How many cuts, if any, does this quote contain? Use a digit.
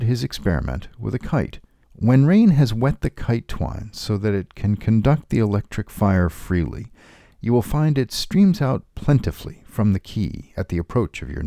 1